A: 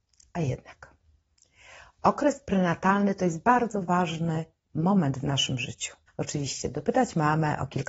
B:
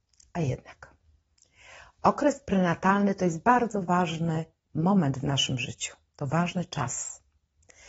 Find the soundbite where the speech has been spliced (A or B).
A